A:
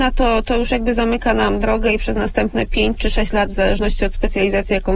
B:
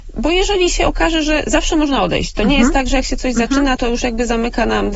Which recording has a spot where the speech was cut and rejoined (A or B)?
B